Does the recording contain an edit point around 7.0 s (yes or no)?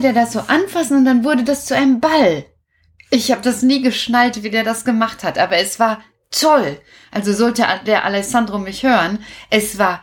no